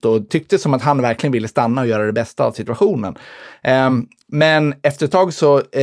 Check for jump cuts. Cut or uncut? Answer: uncut